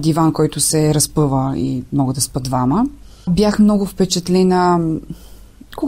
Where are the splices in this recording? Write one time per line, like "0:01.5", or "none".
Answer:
none